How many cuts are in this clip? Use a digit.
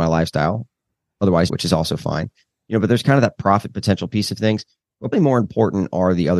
2